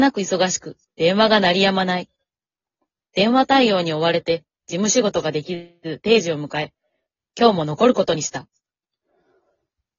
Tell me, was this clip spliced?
no; 0 cuts

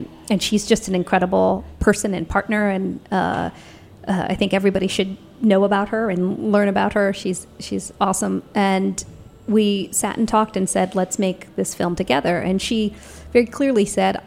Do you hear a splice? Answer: no; 0 cuts

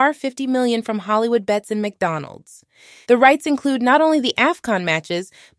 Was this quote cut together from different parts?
yes; 1 cut; at 3.0 s

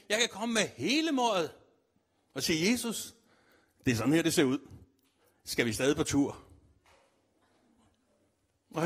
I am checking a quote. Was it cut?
no; 0 cuts

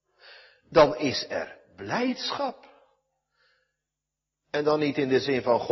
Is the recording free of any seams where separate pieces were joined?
yes; 0 cuts

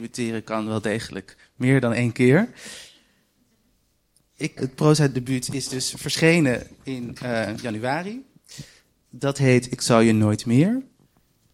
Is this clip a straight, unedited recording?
no; 1 cut; at 4.6 s

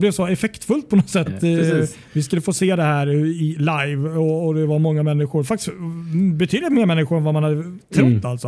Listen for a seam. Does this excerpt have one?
yes; 1 cut; at 1.3 s

